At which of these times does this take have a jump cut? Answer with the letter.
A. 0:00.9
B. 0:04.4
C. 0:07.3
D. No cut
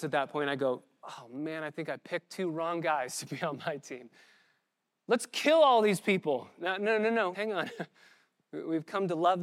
C